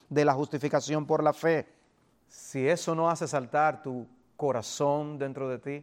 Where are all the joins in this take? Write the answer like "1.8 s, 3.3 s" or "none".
2.1 s

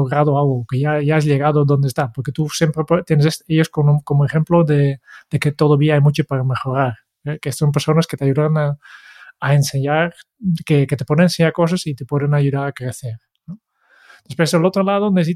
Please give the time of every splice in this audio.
none

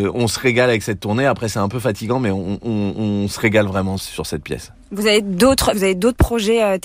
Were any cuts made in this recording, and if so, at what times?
4.0 s, 5.7 s

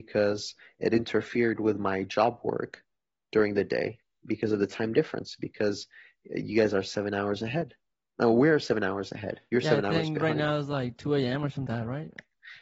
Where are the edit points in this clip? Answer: 11.7 s

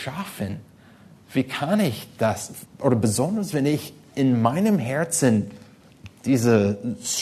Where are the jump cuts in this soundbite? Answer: 2.6 s

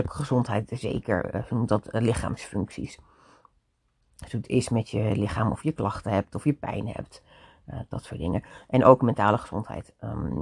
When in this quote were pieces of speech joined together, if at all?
none

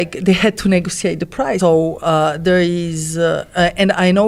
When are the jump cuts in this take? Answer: 1.6 s

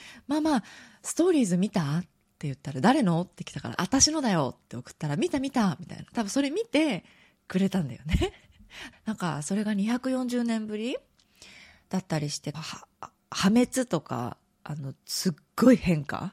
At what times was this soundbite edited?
8.9 s, 12.5 s

